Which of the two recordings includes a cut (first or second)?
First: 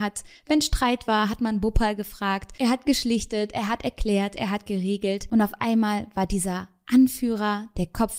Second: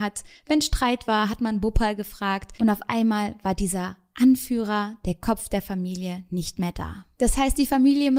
second